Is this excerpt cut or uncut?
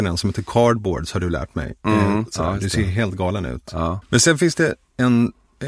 cut